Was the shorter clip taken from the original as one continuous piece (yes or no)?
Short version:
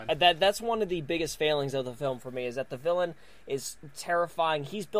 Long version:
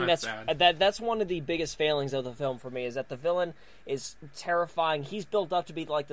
yes